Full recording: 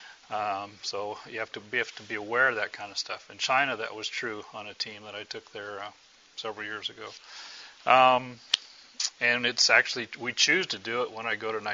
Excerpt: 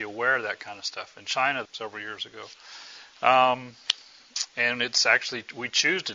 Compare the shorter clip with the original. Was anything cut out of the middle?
yes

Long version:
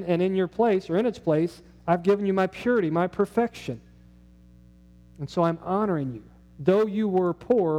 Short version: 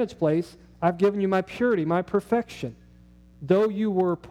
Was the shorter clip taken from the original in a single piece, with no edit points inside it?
no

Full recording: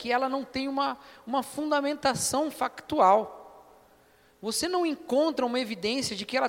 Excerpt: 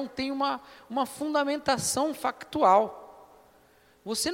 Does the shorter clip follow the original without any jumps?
yes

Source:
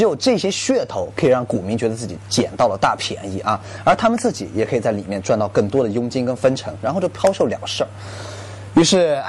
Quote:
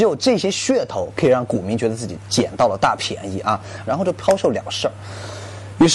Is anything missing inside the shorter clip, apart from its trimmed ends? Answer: yes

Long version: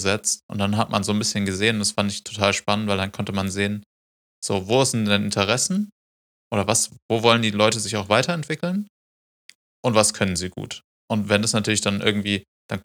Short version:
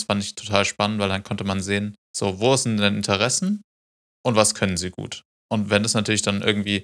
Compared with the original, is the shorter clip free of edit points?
no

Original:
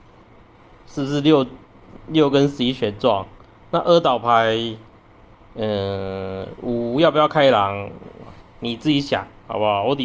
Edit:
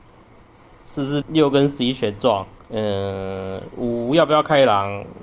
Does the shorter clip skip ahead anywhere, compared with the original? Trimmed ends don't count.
yes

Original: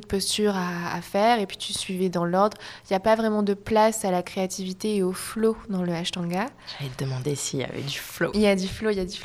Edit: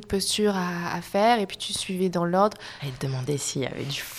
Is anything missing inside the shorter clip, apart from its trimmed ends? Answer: yes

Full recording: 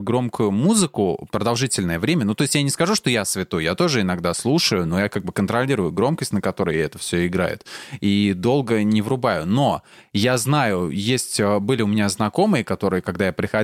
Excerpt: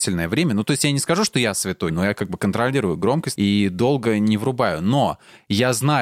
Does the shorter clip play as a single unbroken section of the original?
no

